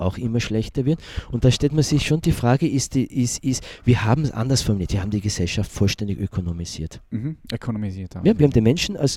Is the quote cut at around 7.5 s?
no; 0 cuts

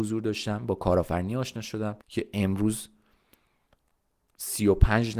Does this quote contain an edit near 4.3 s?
no; 1 cut; at 2.0 s

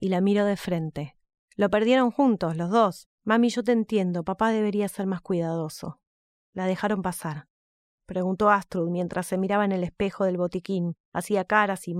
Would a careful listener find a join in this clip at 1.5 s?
no; 3 cuts; at 3.0 s, 6.4 s, 8.0 s

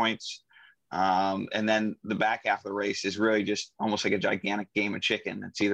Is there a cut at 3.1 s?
no; 0 cuts

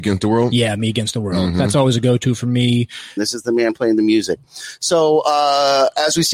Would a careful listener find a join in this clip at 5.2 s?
no; 1 cut; at 3.2 s

